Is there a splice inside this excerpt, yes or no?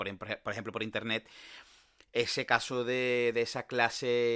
no